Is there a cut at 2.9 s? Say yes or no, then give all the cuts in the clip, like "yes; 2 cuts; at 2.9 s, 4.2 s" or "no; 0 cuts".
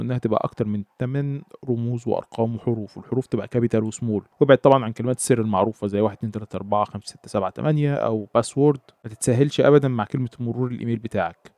no; 1 cut; at 4.3 s